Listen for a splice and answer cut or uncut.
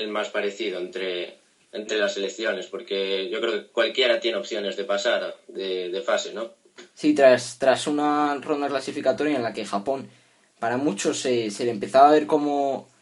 uncut